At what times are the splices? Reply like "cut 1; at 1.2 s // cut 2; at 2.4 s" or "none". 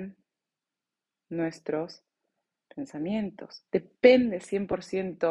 cut 1; at 3.7 s